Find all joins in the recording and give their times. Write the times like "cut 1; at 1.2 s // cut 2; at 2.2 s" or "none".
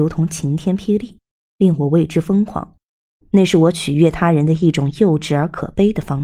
cut 1; at 3.2 s